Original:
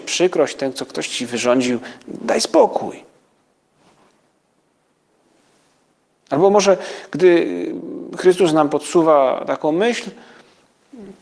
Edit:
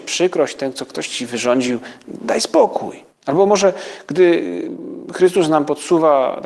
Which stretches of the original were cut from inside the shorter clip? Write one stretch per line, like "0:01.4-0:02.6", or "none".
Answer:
0:03.1-0:06.2